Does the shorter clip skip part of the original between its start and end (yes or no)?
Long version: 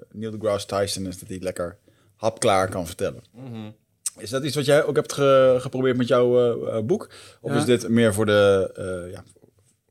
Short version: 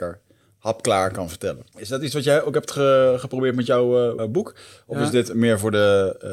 yes